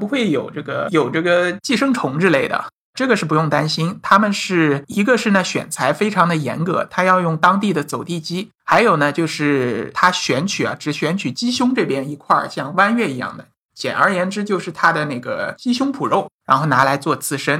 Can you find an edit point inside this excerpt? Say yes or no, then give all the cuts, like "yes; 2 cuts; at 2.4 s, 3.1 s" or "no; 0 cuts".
no; 0 cuts